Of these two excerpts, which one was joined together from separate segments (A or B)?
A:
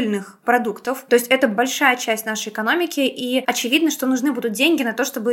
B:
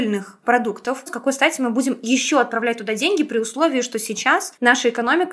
B